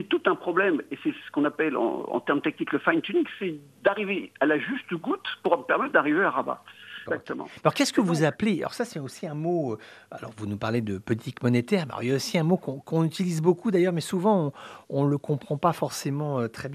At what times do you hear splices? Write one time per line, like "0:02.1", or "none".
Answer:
0:07.1